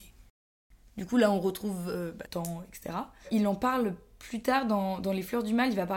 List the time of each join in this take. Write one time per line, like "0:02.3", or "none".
0:02.3